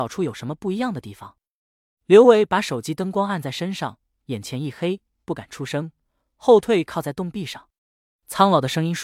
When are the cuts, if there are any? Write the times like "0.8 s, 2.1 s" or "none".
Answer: 1.6 s, 7.8 s